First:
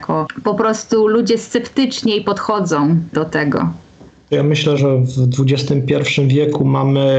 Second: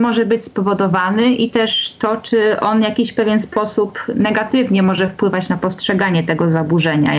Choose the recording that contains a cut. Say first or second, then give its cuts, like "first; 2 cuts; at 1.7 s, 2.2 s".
first; 1 cut; at 4.8 s